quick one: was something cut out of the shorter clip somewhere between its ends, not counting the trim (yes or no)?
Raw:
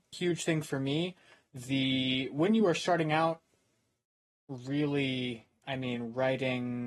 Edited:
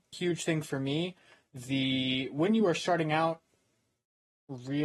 no